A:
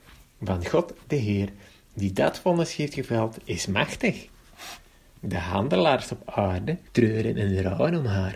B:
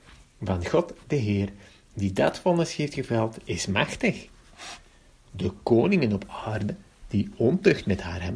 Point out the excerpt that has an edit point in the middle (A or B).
A